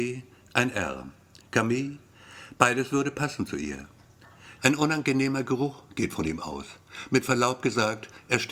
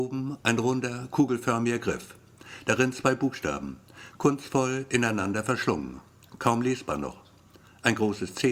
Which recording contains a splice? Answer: first; 2 cuts; at 1.4 s, 4.6 s

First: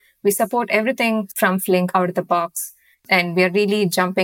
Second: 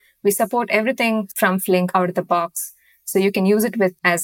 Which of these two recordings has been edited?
first; 1 cut; at 2.9 s

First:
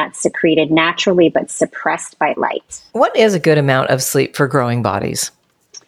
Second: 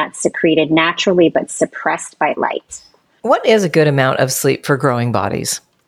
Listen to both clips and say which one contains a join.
first; 1 cut; at 2.9 s

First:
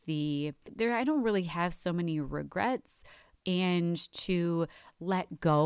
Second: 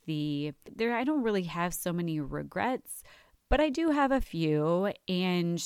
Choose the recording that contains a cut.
first; 1 cut; at 3.4 s

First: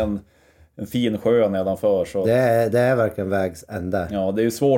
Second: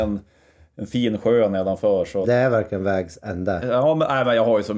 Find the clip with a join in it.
second; 2 cuts; at 2.2 s, 3.6 s

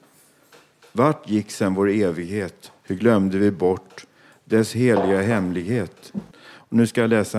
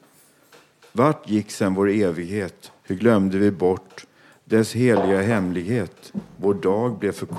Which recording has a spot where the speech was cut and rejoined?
first; 1 cut; at 6.3 s

